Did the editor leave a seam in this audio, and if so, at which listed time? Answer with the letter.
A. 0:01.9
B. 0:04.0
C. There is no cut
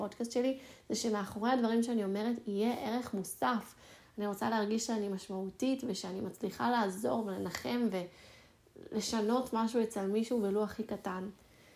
B